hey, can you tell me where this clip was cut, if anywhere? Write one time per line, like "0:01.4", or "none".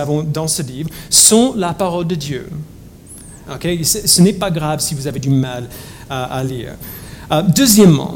0:03.5

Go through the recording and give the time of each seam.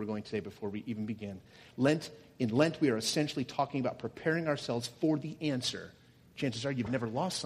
0:06.2

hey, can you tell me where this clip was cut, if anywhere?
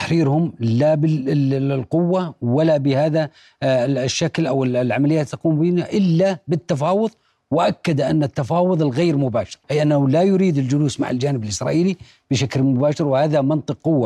0:09.6

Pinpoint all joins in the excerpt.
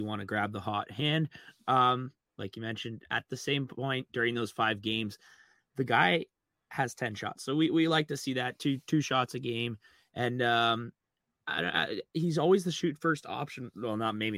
none

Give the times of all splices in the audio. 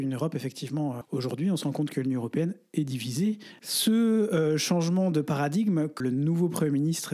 0:01.0
0:03.6
0:06.0

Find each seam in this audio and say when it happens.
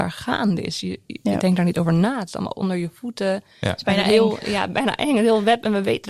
none

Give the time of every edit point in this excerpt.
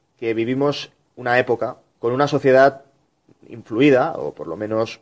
0:01.9

